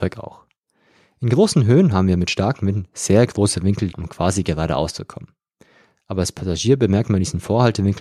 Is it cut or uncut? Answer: cut